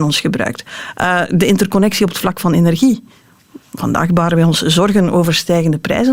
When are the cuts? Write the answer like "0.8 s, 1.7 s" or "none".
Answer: none